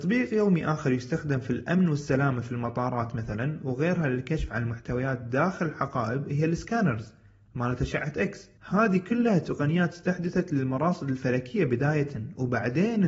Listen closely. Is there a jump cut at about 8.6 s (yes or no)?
yes